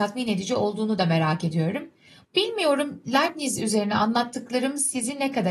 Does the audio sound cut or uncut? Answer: cut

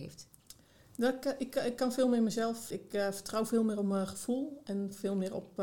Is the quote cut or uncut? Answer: cut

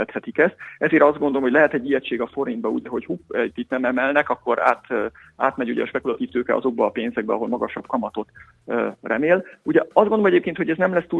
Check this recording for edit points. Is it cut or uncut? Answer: uncut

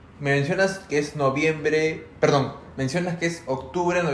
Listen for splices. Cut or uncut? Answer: uncut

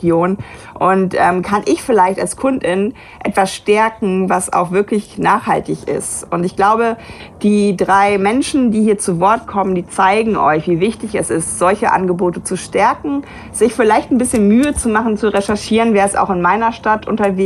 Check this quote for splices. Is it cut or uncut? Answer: uncut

